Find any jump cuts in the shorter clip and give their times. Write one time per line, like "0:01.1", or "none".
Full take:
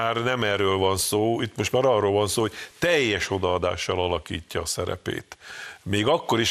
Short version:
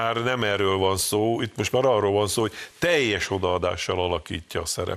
none